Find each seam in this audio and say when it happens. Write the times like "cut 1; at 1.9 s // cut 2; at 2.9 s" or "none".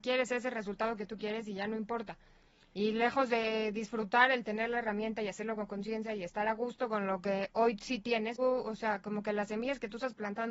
cut 1; at 8.4 s